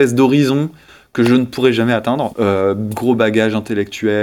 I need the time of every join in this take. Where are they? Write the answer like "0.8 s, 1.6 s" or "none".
2.3 s